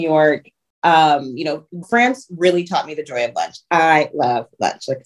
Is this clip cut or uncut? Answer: cut